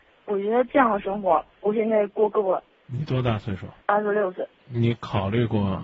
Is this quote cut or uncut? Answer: cut